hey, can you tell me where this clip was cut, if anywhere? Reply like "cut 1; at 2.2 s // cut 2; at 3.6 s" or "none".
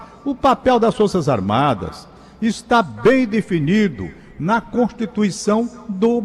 none